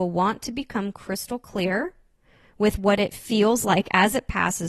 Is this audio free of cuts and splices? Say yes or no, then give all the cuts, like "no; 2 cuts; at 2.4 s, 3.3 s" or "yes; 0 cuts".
yes; 0 cuts